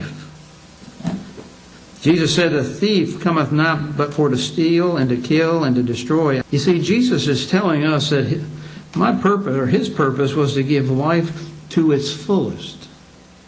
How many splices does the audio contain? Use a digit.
2